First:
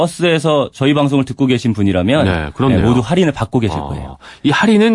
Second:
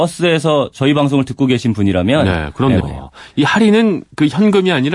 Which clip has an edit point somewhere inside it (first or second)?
second